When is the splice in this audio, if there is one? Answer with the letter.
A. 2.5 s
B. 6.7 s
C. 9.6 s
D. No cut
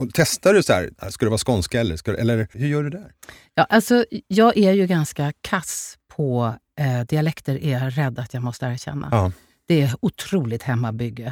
A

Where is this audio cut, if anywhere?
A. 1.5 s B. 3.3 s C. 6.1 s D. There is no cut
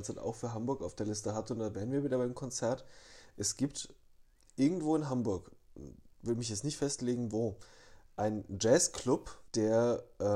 C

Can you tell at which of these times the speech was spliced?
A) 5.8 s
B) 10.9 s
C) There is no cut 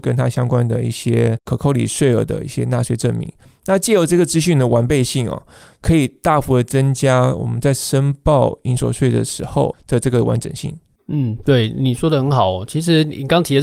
C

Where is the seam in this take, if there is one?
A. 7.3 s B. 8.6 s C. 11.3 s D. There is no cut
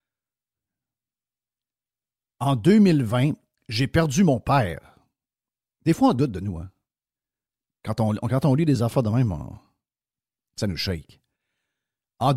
D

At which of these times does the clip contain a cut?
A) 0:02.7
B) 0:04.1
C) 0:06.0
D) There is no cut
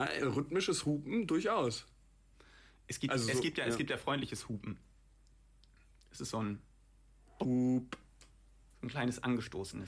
D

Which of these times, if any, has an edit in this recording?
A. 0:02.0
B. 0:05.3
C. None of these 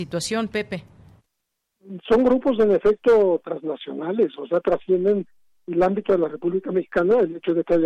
C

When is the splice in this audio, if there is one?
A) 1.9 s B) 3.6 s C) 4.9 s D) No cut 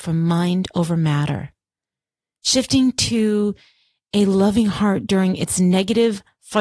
D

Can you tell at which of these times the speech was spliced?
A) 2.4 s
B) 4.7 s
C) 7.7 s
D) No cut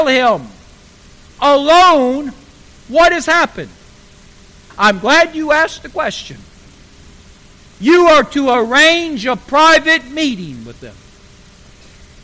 B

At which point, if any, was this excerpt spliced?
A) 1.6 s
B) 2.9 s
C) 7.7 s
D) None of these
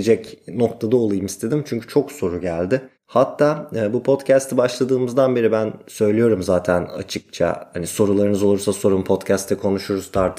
B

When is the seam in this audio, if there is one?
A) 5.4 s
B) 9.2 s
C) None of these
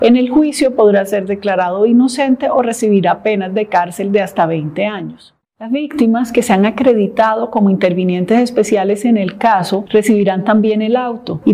A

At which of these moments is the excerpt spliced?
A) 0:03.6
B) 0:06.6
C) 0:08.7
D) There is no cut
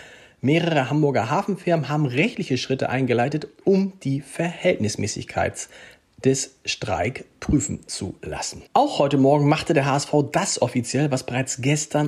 C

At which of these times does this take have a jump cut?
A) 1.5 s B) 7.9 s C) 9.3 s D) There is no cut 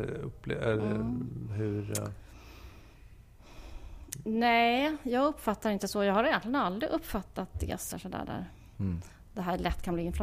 B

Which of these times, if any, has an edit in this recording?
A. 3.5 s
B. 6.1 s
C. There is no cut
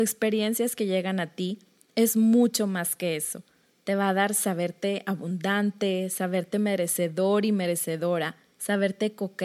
C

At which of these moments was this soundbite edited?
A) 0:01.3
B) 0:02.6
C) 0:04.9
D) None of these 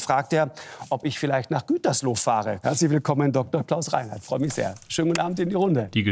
B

